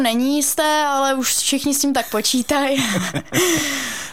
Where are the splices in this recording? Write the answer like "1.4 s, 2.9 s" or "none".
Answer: none